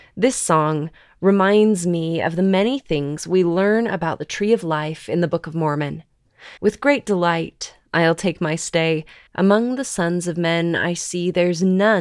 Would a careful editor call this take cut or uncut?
cut